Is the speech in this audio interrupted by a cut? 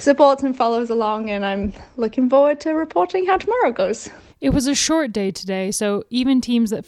yes; 1 cut; at 4.3 s

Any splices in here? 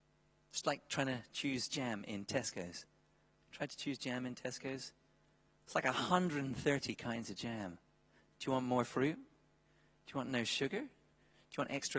no; 0 cuts

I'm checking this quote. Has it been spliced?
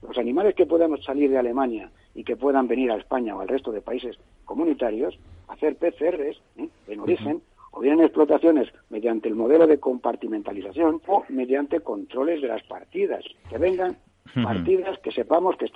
yes; 2 cuts; at 11.0 s, 13.4 s

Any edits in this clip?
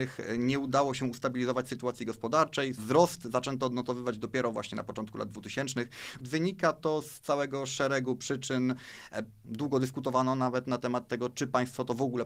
yes; 3 cuts; at 2.8 s, 6.2 s, 9.4 s

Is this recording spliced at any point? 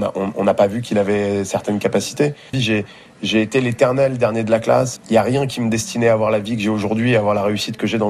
yes; 2 cuts; at 2.5 s, 5.0 s

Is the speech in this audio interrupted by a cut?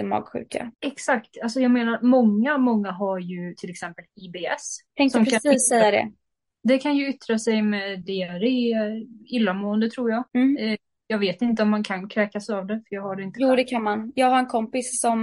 no; 0 cuts

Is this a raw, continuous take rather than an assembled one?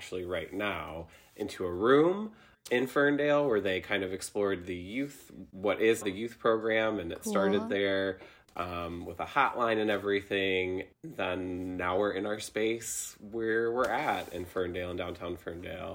no; 1 cut; at 6.0 s

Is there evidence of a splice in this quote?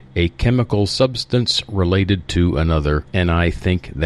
yes; 1 cut; at 3.1 s

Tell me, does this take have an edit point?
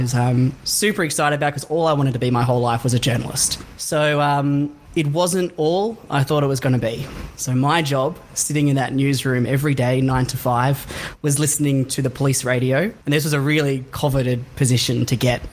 yes; 1 cut; at 13.0 s

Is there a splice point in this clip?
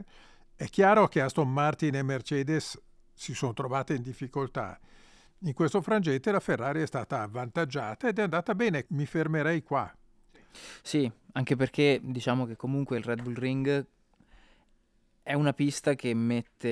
yes; 1 cut; at 8.9 s

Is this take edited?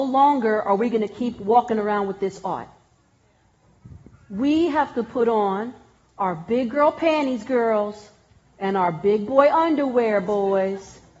no; 0 cuts

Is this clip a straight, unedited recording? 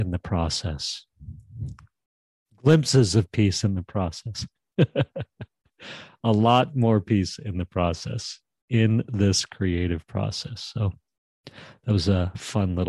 yes; 0 cuts

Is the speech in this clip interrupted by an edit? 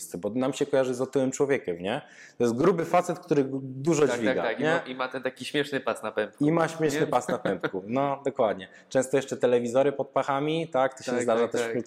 no; 0 cuts

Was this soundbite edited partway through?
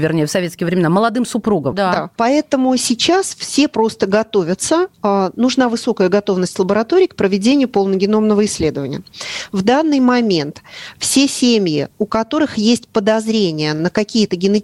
yes; 1 cut; at 1.7 s

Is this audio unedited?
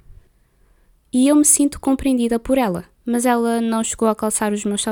no; 2 cuts; at 1.0 s, 2.9 s

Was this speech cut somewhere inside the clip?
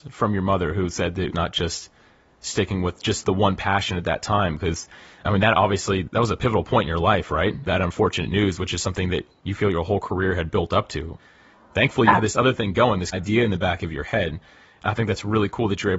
yes; 1 cut; at 1.3 s

